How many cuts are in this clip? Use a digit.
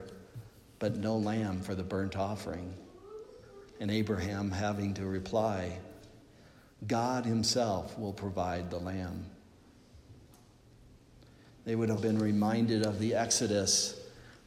1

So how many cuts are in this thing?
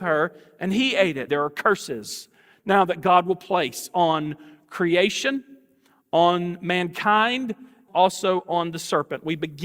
2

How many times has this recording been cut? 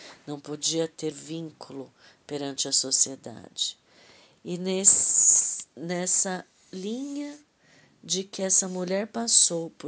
1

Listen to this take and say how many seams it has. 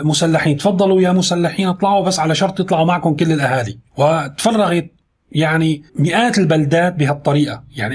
2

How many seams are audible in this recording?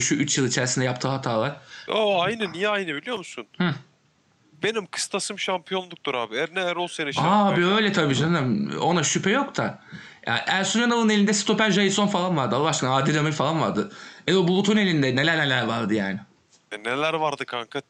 1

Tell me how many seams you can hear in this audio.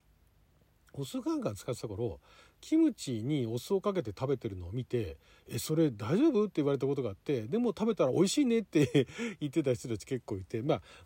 1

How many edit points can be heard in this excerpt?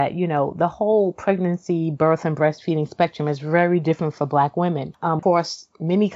1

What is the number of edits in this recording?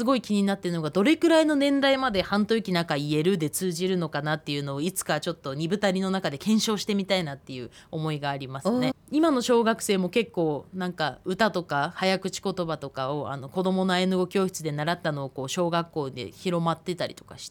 1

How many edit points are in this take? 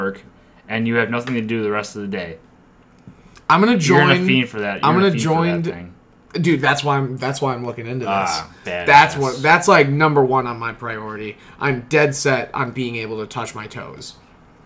1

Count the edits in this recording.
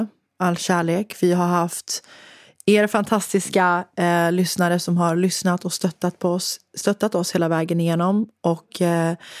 0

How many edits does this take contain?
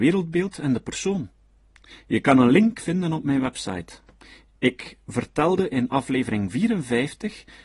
1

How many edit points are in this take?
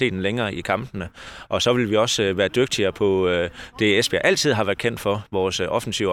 0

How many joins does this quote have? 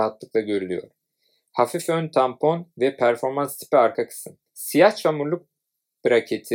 1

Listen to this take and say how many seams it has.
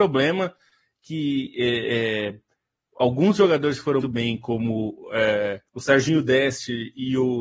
2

